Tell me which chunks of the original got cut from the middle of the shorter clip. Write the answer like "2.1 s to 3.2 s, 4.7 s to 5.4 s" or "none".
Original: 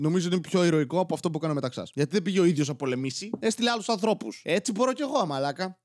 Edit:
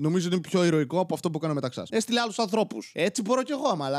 1.9 s to 3.4 s